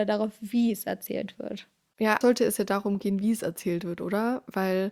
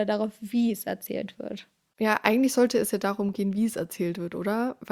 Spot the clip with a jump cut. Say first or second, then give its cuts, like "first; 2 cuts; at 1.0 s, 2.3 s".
first; 1 cut; at 2.2 s